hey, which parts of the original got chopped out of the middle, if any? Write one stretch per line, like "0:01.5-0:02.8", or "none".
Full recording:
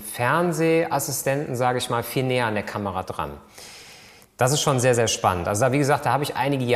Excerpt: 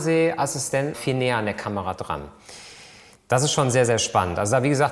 0:01.5-0:02.0